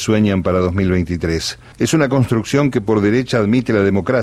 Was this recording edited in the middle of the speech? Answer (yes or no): yes